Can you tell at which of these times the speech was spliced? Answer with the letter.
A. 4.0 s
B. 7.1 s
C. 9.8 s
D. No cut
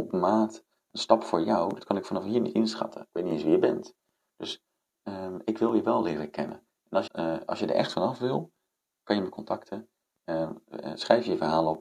B